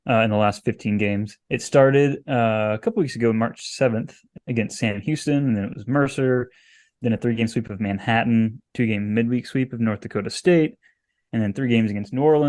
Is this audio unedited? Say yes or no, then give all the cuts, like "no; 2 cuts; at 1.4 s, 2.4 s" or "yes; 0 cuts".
no; 1 cut; at 1.4 s